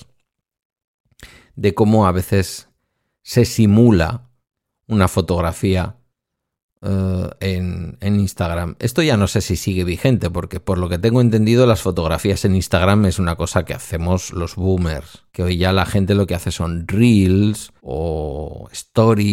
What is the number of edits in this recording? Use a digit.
2